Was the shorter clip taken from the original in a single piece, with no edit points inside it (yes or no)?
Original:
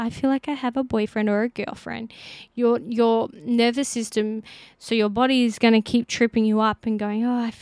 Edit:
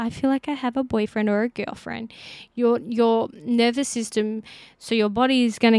yes